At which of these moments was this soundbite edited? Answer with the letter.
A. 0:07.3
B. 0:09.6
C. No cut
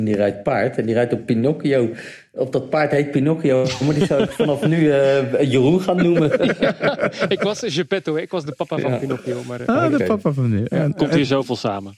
C